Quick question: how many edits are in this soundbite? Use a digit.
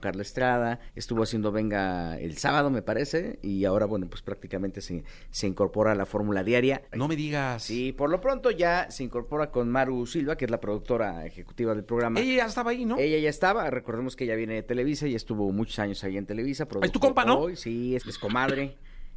1